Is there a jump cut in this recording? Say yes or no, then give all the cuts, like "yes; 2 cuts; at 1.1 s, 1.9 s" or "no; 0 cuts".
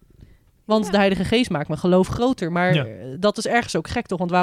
no; 0 cuts